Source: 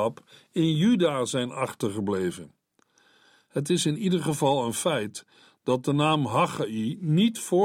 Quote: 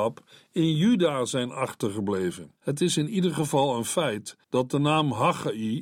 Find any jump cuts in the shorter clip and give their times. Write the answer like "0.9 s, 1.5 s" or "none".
2.6 s, 4.4 s